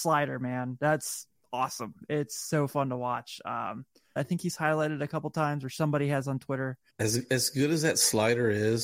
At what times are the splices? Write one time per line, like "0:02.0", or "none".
0:04.2
0:06.9